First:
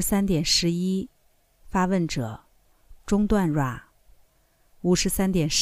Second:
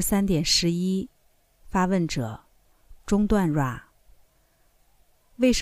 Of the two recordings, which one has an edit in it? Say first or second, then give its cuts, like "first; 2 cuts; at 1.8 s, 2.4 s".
first; 1 cut; at 4.7 s